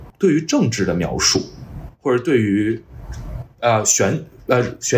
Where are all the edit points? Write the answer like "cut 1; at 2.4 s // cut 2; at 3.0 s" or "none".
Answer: none